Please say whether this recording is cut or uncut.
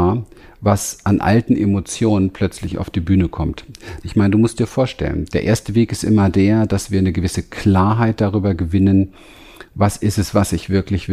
cut